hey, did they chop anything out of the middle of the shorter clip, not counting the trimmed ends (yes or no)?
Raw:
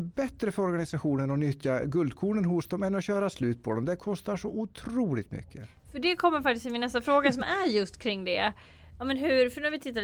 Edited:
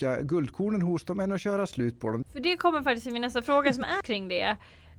yes